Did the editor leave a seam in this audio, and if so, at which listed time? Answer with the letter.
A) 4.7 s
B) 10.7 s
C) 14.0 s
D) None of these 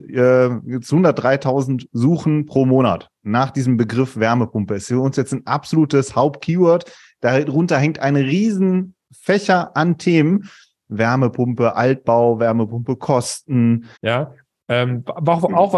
C